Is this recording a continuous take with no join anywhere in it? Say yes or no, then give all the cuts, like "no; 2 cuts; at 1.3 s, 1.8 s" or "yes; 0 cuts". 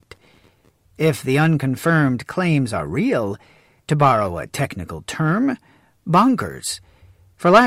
no; 1 cut; at 3.8 s